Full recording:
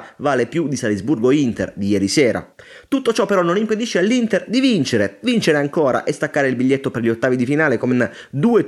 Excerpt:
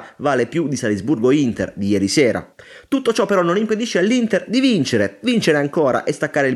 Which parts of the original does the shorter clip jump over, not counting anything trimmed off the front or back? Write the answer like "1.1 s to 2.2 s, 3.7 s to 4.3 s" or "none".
none